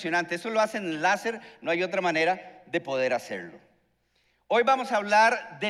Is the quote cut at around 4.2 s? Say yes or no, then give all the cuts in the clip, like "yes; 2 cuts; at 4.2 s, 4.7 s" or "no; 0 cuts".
no; 0 cuts